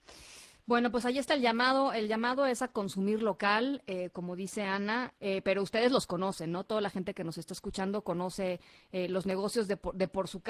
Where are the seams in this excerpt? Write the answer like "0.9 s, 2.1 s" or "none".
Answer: 5.2 s